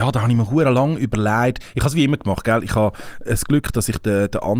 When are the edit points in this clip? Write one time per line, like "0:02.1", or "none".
none